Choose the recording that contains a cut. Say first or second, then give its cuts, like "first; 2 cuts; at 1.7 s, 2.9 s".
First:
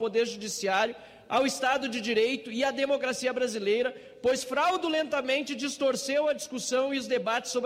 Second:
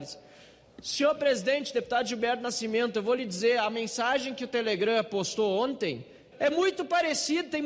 second; 1 cut; at 6.3 s